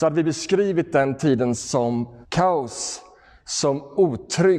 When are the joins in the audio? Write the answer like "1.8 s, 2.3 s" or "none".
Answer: 2.2 s